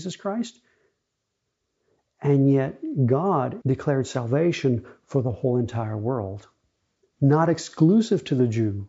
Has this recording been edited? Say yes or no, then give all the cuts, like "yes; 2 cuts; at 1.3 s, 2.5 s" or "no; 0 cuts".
yes; 1 cut; at 3.6 s